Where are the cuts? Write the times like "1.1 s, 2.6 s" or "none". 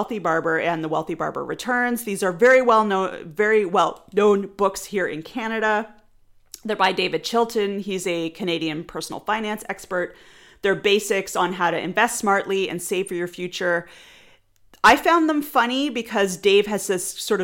none